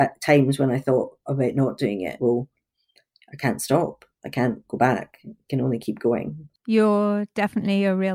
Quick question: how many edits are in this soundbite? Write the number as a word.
one